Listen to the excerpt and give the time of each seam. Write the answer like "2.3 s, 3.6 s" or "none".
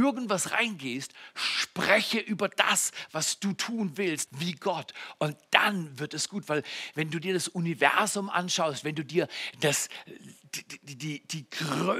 4.3 s